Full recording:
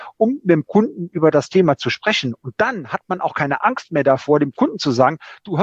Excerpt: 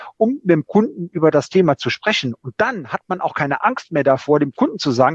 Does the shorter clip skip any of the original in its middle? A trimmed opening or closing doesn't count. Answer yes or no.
no